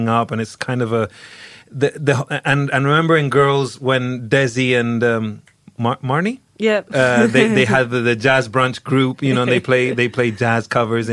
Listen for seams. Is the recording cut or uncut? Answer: uncut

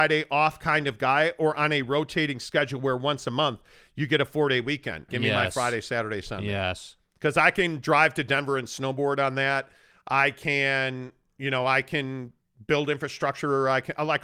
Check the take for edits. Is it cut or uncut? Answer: cut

